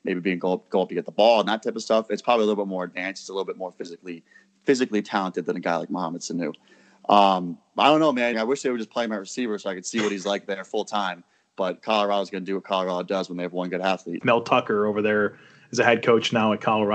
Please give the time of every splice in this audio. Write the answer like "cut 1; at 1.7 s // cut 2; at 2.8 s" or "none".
cut 1; at 8.3 s // cut 2; at 14.2 s